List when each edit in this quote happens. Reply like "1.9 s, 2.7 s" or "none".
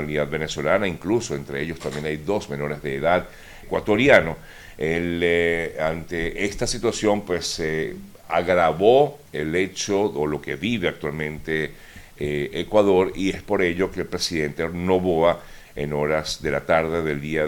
3.6 s